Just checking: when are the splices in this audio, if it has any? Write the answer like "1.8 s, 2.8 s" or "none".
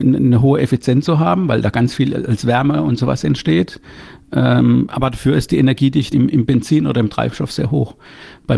6.1 s